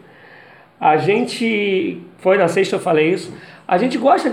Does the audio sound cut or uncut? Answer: uncut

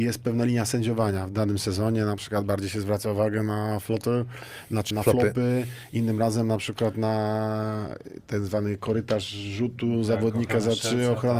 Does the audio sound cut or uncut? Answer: cut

